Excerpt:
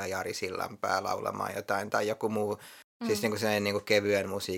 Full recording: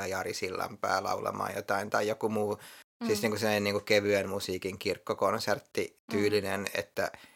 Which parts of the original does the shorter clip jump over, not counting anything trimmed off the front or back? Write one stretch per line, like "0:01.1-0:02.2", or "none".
none